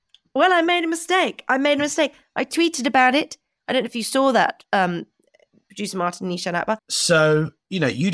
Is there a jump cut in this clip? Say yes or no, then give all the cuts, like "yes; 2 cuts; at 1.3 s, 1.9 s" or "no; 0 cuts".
yes; 1 cut; at 6.8 s